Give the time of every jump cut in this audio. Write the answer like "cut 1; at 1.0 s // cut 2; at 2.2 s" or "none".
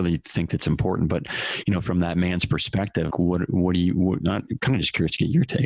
cut 1; at 3.1 s